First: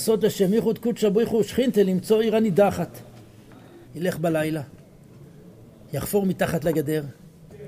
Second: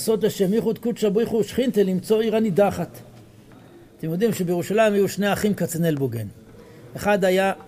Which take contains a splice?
first; 1 cut; at 3.9 s

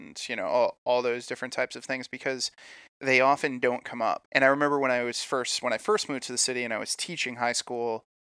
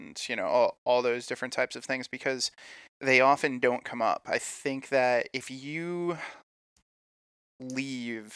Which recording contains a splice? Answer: first; 1 cut; at 4.2 s

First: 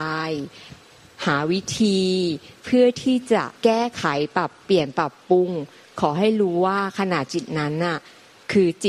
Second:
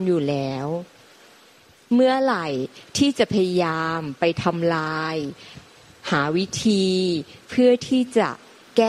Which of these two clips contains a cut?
first; 1 cut; at 3.6 s

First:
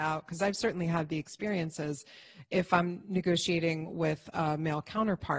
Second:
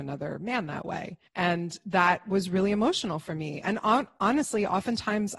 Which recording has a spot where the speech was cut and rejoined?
second; 1 cut; at 1.3 s

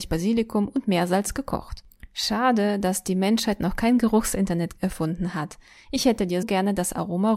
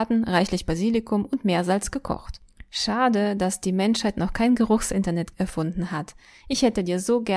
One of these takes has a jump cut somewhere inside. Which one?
first; 1 cut; at 6.4 s

